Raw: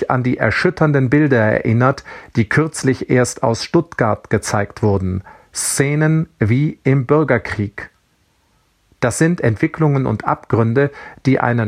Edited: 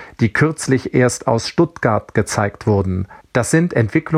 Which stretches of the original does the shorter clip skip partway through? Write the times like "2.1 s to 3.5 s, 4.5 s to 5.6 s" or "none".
5.4 s to 8.9 s